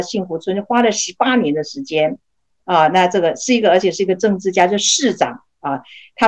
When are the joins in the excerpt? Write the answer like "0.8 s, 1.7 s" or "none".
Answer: none